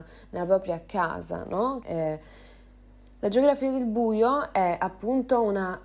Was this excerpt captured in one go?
no; 1 cut; at 1.8 s

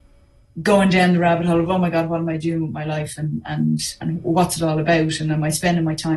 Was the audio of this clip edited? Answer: no; 0 cuts

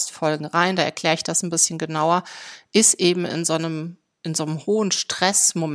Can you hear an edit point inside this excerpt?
no; 0 cuts

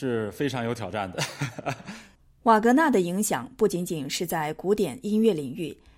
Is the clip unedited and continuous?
yes; 0 cuts

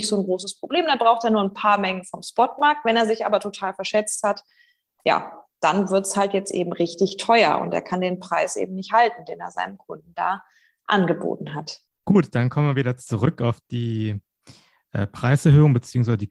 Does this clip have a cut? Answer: no; 0 cuts

